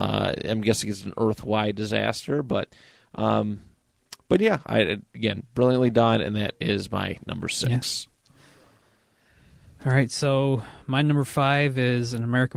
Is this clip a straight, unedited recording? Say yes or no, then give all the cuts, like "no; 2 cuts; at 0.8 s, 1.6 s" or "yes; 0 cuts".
yes; 0 cuts